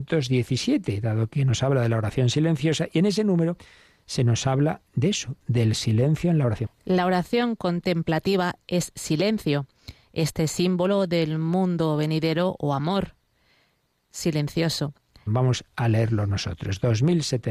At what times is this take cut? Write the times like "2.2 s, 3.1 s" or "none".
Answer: 6.6 s, 15.3 s